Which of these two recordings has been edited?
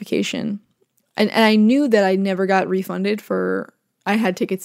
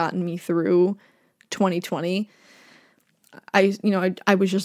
first; 1 cut; at 1.0 s

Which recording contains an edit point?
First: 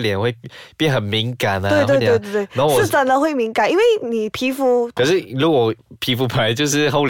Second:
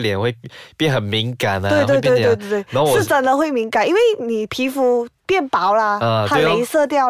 first; 2 cuts; at 2.0 s, 5.0 s

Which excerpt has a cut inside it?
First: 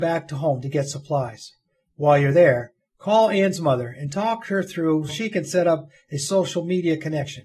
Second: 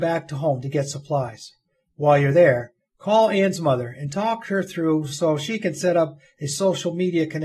first; 1 cut; at 5.1 s

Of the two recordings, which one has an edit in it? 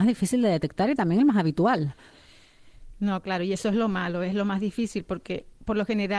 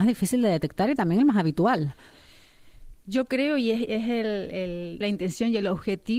second; 2 cuts; at 2.9 s, 5.0 s

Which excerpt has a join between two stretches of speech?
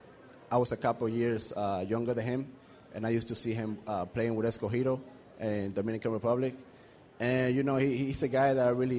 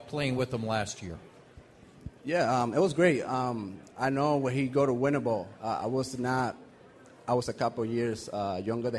second; 1 cut; at 2.2 s

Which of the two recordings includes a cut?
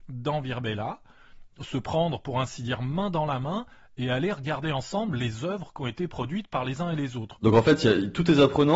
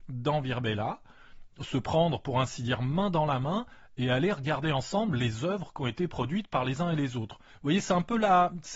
first; 1 cut; at 7.4 s

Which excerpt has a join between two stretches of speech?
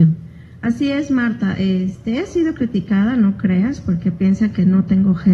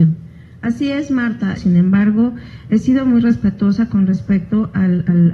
second; 1 cut; at 1.6 s

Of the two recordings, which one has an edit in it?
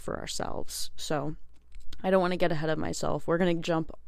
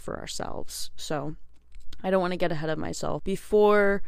second; 1 cut; at 3.2 s

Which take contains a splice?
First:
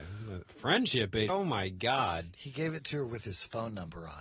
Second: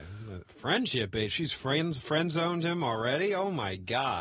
first; 1 cut; at 1.3 s

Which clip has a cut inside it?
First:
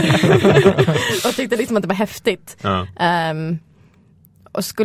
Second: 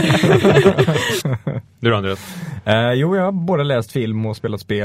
second; 1 cut; at 1.2 s

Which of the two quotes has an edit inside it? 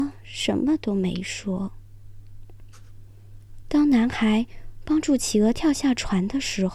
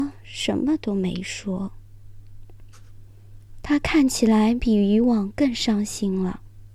second; 1 cut; at 3.6 s

